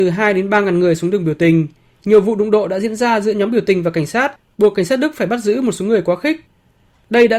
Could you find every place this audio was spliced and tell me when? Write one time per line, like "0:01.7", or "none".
0:01.9